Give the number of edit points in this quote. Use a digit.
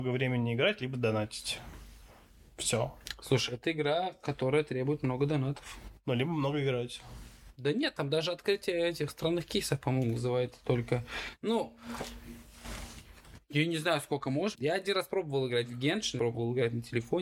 3